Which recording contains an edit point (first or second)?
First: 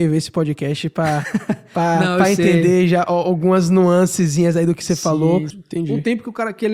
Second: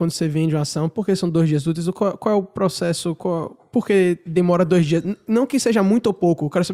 first